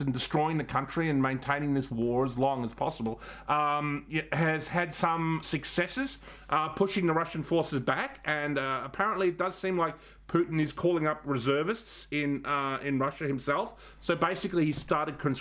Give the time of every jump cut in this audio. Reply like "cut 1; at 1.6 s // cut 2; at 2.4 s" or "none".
cut 1; at 5.4 s

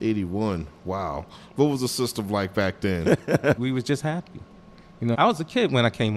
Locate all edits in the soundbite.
cut 1; at 3.6 s // cut 2; at 5.1 s

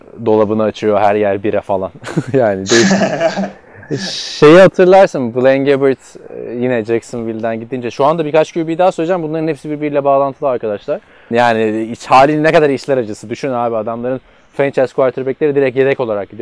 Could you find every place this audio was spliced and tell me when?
cut 1; at 11.3 s

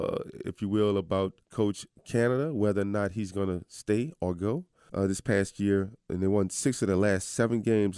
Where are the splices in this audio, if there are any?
cut 1; at 1.4 s // cut 2; at 4.9 s

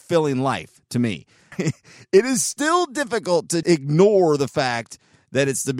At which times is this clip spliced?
cut 1; at 1.5 s // cut 2; at 3.6 s

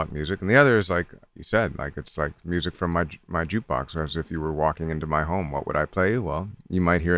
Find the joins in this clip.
none

